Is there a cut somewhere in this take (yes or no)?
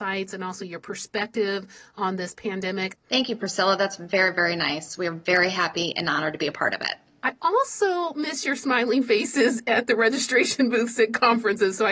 yes